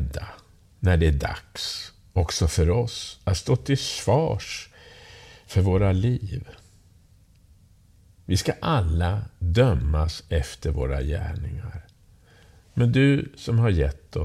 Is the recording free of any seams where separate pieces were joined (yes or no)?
yes